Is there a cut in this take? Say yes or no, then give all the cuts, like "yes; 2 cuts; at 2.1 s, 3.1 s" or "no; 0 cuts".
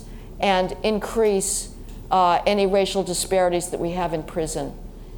no; 0 cuts